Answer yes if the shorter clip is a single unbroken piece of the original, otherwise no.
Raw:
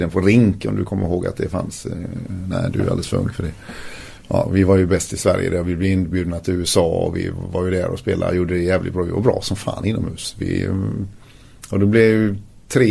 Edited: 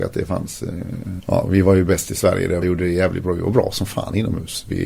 no